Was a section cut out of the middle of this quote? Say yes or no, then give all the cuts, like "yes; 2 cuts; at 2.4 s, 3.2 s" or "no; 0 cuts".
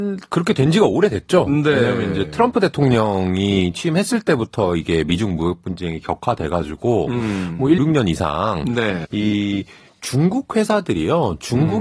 yes; 2 cuts; at 7.8 s, 9.0 s